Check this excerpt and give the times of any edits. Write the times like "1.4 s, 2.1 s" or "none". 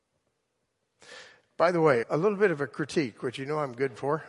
2.0 s